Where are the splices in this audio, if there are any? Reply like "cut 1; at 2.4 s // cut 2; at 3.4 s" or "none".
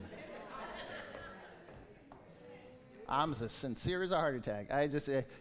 none